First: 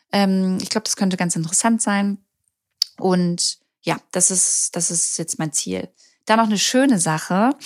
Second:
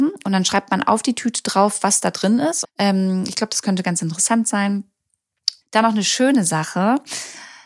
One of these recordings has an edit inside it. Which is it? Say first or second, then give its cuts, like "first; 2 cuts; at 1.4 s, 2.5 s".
second; 2 cuts; at 2.6 s, 5.6 s